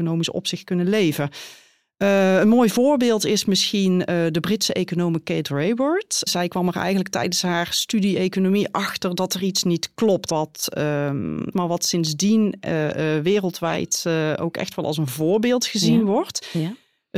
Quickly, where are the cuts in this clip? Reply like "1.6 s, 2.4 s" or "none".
10.3 s, 11.5 s